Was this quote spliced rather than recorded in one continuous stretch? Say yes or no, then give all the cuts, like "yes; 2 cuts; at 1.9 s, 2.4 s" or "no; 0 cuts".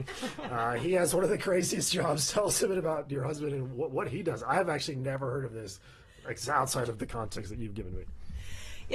no; 0 cuts